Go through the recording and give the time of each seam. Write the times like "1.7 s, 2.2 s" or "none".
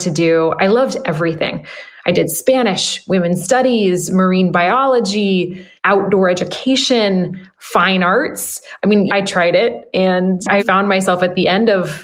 9.1 s, 10.6 s